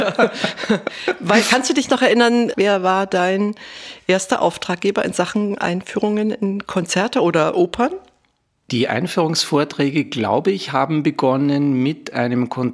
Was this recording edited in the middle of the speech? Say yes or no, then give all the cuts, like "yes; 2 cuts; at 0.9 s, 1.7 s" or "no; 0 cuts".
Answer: no; 0 cuts